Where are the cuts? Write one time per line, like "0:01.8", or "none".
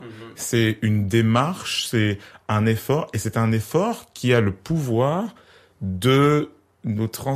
none